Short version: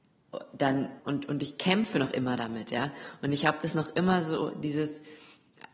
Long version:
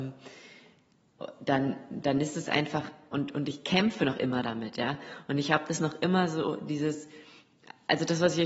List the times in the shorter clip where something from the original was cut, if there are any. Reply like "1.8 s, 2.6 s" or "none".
1.0 s